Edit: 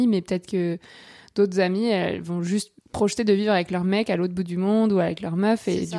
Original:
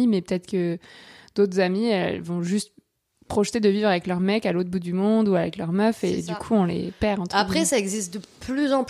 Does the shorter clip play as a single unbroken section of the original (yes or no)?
no